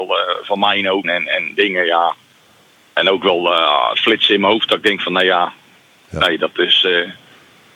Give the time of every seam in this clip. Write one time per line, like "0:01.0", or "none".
0:01.0